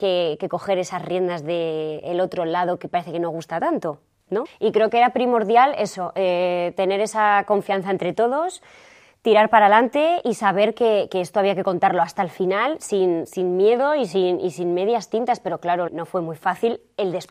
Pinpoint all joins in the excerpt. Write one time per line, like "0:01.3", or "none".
0:04.5
0:15.9